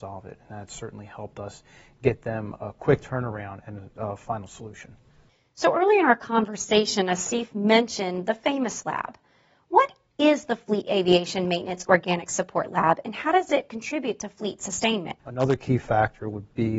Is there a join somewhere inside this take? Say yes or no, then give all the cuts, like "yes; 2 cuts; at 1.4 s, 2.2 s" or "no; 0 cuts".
yes; 1 cut; at 15.2 s